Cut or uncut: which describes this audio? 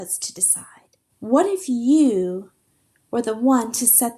cut